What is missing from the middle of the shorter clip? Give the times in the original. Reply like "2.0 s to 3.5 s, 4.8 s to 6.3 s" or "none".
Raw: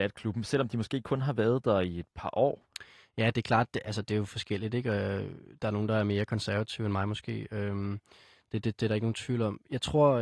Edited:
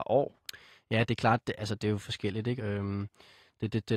4.8 s to 7.5 s